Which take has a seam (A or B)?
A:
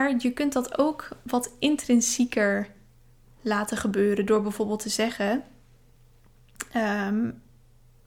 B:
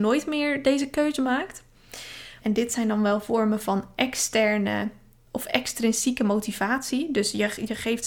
B